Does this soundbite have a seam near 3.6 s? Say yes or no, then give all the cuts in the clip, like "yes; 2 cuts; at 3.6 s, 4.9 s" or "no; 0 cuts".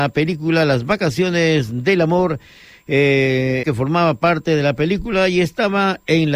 yes; 1 cut; at 3.6 s